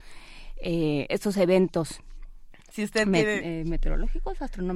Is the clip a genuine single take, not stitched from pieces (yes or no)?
no